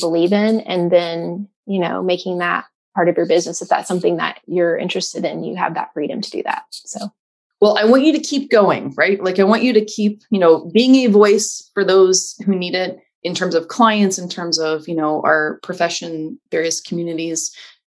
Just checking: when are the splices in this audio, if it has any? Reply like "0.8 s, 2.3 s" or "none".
none